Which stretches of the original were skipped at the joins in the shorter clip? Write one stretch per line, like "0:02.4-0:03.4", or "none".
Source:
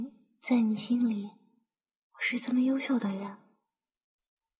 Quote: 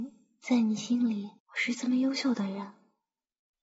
0:01.4-0:02.0